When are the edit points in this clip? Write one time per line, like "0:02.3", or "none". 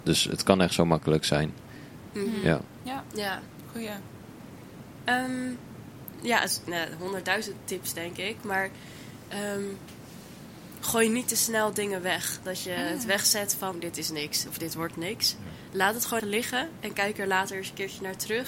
0:13.7
0:16.2

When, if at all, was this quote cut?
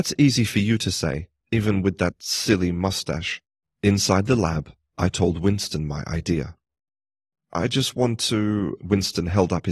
0:01.4
0:03.6
0:07.3

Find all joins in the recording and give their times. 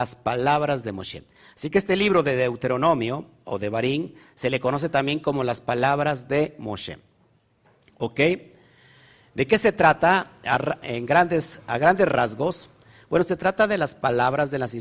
0:10.8

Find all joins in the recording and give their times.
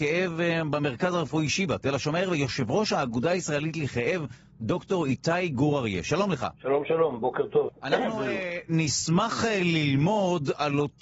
0:06.5

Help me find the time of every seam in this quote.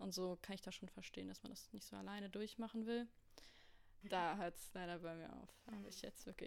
0:04.0

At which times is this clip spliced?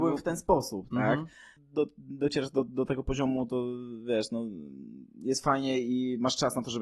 0:01.6

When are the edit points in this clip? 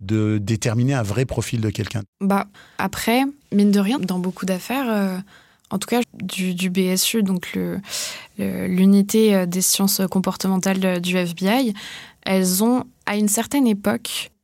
0:04.0
0:06.0

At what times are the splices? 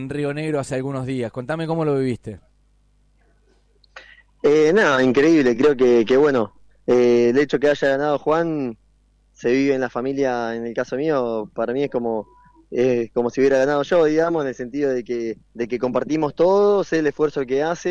none

